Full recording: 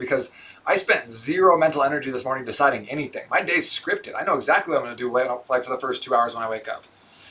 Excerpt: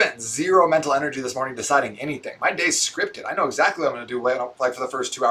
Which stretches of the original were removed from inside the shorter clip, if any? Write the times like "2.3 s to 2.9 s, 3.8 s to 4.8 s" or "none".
none